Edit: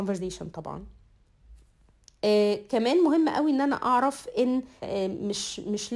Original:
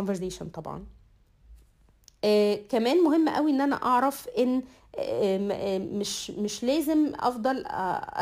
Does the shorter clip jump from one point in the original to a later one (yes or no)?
yes